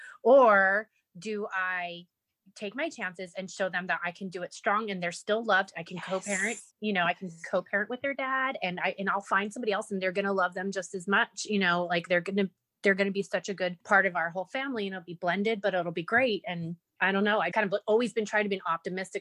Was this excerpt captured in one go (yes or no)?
no